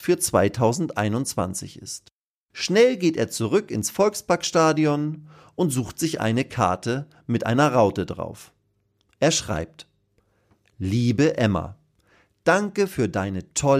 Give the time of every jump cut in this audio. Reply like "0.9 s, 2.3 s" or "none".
none